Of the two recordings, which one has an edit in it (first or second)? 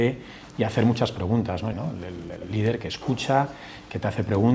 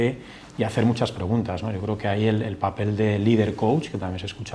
first